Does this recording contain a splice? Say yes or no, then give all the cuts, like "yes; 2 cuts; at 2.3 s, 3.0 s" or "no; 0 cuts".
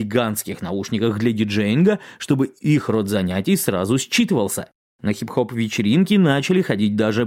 yes; 1 cut; at 4.9 s